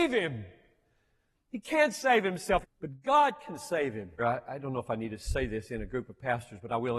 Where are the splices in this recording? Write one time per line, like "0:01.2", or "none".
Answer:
0:02.6
0:04.2